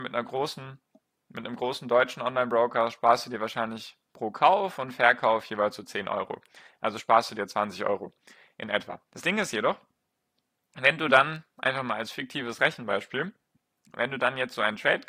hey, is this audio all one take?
no; 1 cut; at 9.1 s

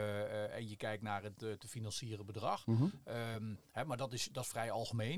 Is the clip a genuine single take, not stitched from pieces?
yes; 0 cuts

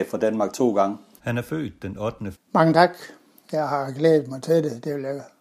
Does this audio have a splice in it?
yes; 2 cuts; at 1.2 s, 2.3 s

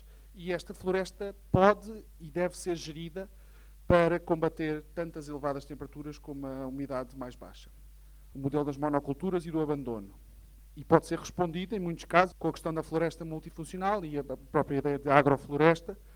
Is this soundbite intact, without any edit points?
no; 2 cuts; at 8.3 s, 12.3 s

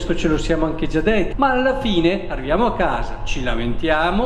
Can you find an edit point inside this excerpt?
yes; 1 cut; at 1.3 s

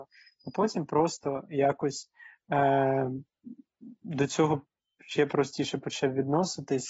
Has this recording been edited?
no; 0 cuts

